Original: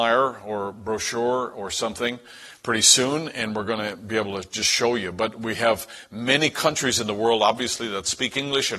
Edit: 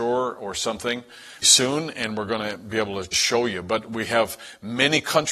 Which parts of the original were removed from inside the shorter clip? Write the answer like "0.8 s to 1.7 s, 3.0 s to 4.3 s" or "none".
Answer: 2.6 s to 2.8 s, 4.5 s to 4.6 s